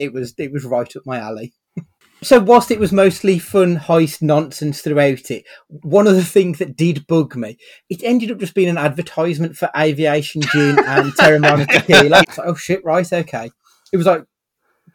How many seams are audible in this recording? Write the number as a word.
one